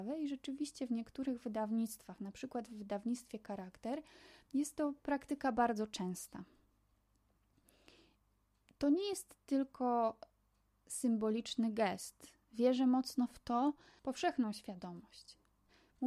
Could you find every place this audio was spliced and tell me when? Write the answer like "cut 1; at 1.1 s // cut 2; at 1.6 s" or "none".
cut 1; at 14.0 s